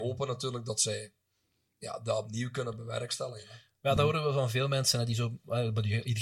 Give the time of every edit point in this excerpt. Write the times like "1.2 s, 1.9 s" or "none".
none